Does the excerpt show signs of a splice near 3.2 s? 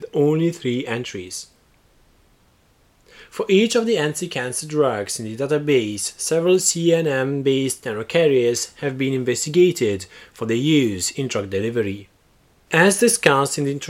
no; 1 cut; at 12.7 s

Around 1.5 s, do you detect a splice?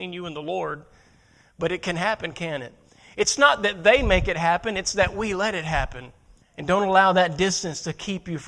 no; 1 cut; at 6.4 s

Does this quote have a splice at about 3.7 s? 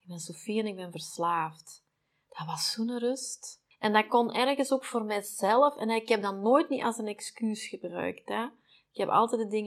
yes; 1 cut; at 3.7 s

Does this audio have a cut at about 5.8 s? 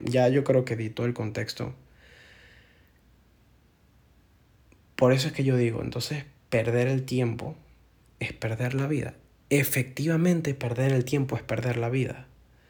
no; 0 cuts

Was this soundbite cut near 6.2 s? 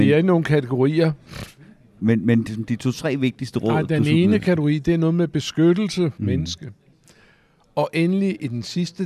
yes; 1 cut; at 6.2 s

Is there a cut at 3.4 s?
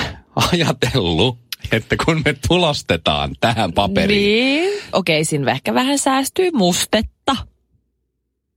no; 1 cut; at 4.9 s

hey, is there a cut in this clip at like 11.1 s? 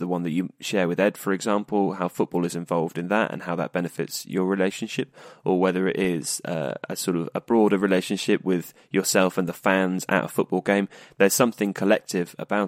no; 0 cuts

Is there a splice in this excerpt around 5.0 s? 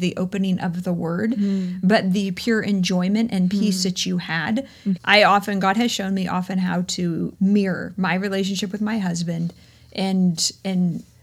yes; 2 cuts; at 5.0 s, 7.3 s

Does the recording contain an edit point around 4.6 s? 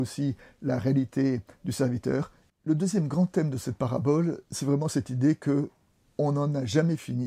no; 1 cut; at 2.5 s

